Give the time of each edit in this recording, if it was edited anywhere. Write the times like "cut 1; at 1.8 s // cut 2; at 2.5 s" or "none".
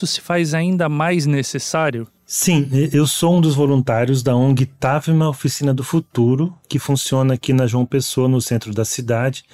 none